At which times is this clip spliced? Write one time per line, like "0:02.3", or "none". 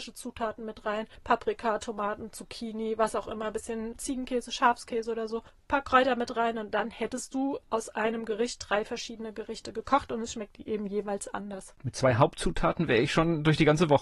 none